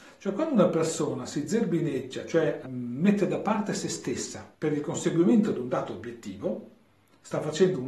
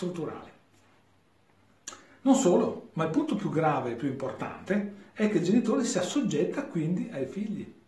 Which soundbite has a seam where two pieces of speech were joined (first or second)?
first